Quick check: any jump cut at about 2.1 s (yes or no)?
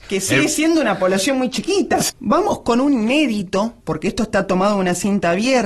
yes